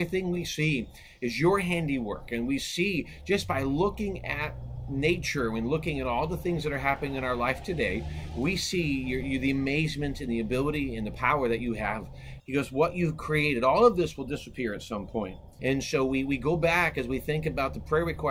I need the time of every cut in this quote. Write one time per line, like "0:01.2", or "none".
0:12.4
0:15.6

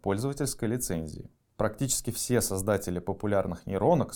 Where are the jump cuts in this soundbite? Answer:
0:01.5

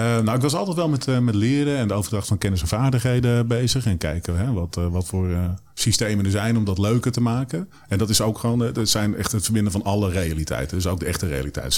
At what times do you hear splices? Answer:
none

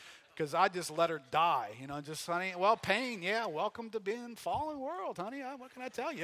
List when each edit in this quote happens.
none

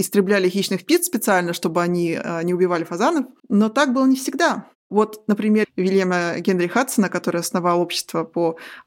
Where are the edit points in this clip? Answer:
0:03.4
0:05.6

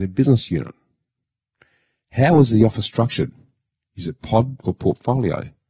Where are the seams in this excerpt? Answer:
0:04.6

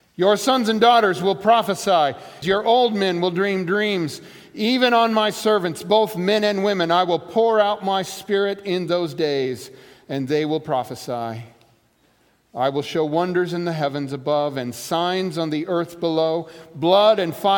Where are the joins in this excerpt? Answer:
0:02.4

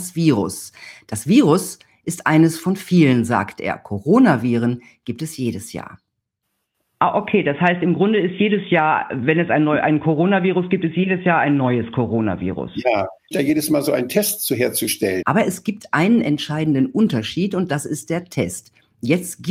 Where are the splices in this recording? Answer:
0:13.3
0:15.2

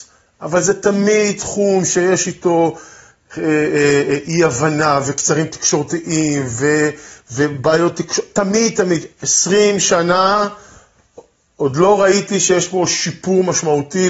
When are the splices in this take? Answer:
none

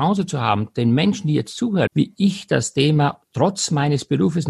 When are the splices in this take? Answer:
0:01.9

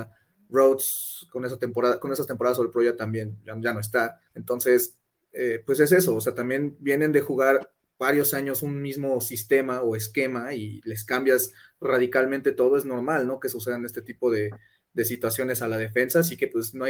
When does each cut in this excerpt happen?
0:04.3

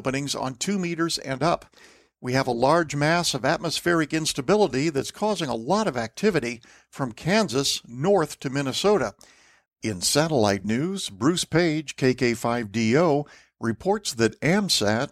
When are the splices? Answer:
0:09.7

